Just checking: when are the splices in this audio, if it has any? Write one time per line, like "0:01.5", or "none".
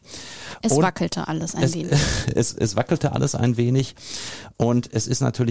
none